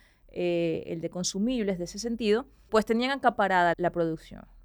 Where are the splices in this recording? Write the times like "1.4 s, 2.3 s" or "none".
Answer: 2.7 s, 3.7 s